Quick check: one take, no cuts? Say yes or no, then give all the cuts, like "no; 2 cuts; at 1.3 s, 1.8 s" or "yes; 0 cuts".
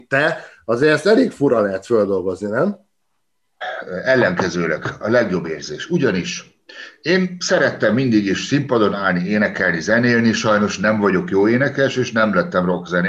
yes; 0 cuts